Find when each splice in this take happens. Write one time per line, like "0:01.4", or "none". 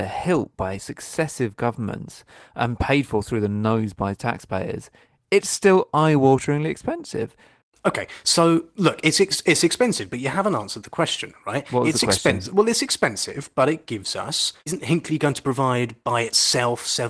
0:14.6